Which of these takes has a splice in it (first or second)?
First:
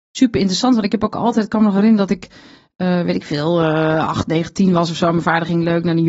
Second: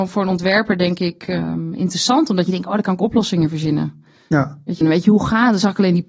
second